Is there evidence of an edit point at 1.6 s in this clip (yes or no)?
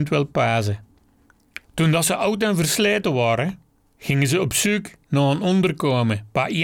yes